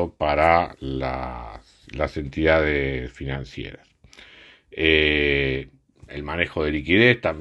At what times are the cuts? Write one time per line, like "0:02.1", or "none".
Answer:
none